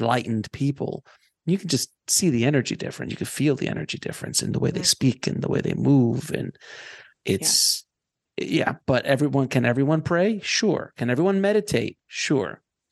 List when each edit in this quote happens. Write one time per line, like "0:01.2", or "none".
none